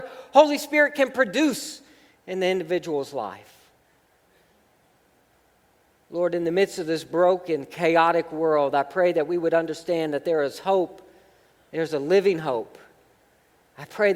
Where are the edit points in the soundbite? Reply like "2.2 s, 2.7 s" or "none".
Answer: none